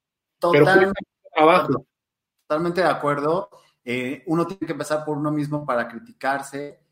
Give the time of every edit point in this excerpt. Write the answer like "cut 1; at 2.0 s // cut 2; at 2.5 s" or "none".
none